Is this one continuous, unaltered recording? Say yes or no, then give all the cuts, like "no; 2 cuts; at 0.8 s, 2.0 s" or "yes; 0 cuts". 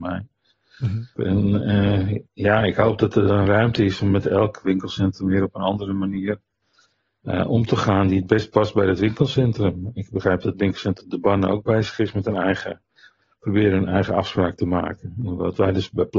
no; 1 cut; at 1.2 s